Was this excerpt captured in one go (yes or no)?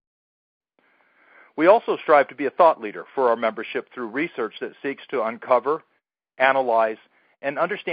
yes